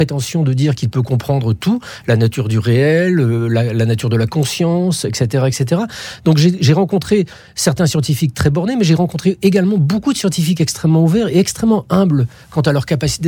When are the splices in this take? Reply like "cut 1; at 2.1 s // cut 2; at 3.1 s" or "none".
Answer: none